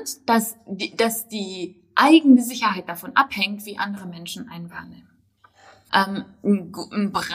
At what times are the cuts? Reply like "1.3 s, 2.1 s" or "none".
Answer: 5.9 s